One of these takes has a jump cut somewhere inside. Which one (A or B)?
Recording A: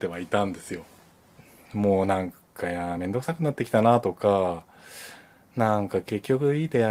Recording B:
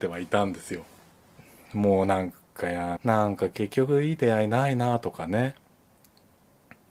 B